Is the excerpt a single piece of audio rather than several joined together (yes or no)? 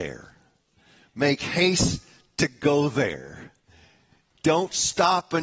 yes